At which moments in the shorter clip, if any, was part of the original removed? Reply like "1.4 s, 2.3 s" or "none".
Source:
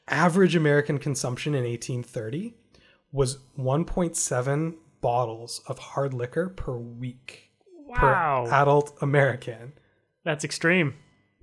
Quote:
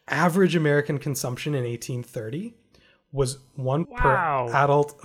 3.9 s